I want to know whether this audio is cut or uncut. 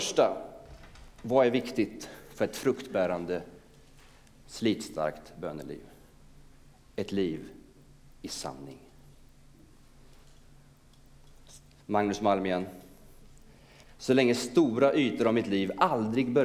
cut